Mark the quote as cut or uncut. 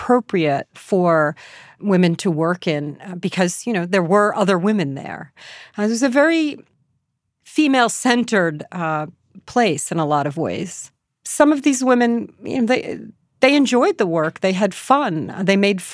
uncut